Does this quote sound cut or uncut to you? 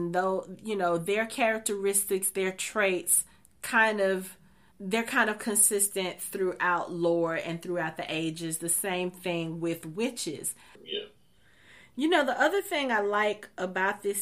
cut